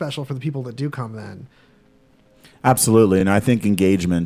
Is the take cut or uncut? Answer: uncut